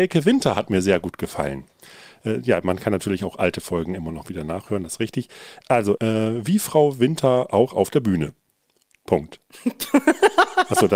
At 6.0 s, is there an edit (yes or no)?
yes